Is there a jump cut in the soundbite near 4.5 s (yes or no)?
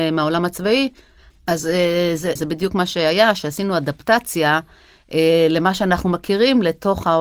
no